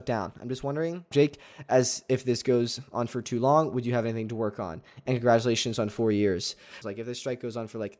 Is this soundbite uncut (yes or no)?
no